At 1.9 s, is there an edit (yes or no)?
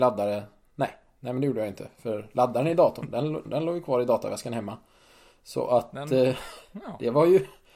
no